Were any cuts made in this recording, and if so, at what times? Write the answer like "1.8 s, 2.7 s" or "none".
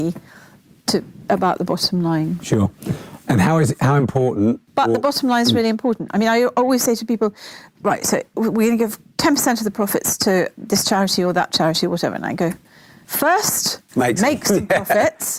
7.7 s